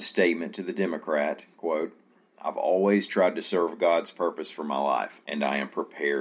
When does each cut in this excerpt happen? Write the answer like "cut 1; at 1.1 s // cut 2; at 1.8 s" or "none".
cut 1; at 5.2 s